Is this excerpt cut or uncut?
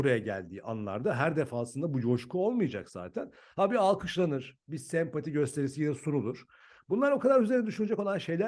uncut